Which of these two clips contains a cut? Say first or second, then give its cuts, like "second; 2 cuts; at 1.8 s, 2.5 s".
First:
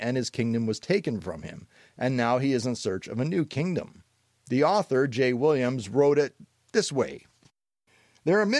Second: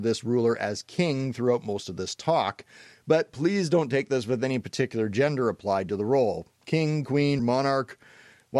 second; 1 cut; at 7.4 s